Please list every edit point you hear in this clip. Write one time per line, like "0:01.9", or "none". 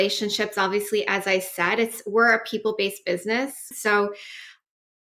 0:03.7